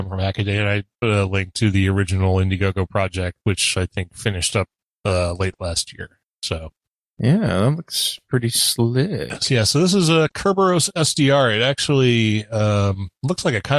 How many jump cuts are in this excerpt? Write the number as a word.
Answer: zero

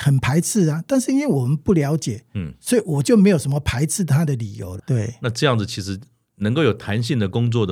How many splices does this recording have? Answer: one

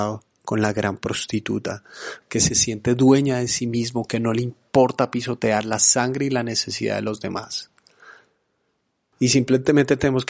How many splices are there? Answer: two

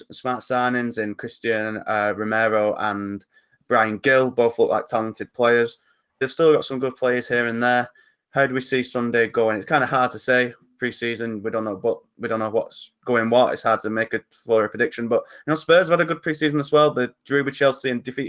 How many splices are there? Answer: one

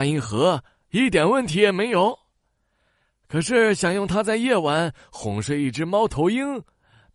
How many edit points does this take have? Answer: zero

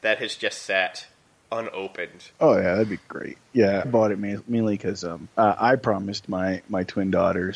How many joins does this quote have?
three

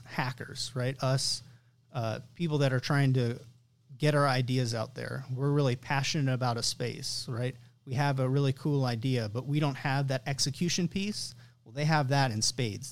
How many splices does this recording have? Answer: zero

